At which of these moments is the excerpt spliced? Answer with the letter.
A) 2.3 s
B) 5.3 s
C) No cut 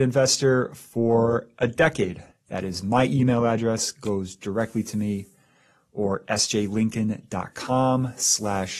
A